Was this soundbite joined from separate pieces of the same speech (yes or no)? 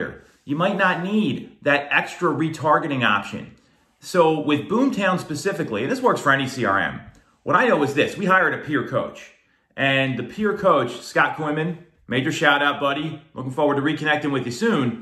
no